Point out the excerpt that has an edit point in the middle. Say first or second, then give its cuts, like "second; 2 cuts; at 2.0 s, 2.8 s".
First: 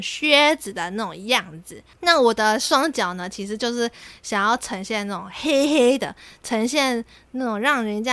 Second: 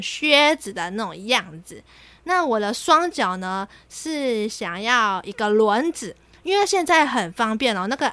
first; 1 cut; at 1.9 s